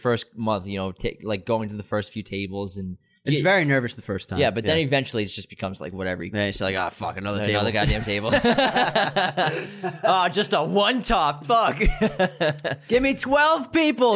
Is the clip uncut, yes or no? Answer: yes